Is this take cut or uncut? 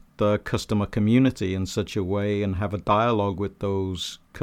uncut